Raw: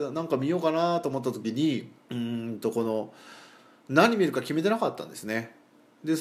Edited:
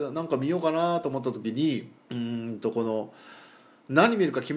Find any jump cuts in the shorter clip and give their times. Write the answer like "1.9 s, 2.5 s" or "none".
none